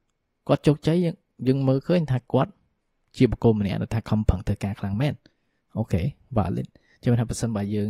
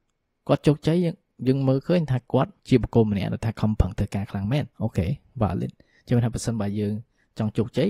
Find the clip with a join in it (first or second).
second